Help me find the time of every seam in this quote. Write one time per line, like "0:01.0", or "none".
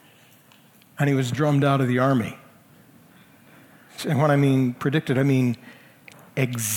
0:04.0